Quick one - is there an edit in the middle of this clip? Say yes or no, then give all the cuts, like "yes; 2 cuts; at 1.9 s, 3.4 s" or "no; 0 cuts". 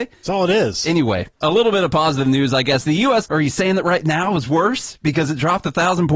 yes; 2 cuts; at 1.4 s, 3.2 s